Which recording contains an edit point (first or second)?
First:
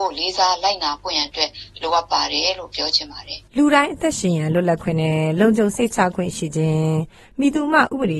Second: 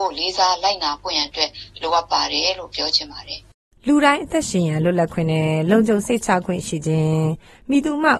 first